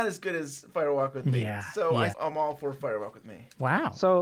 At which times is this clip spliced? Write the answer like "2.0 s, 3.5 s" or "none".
2.1 s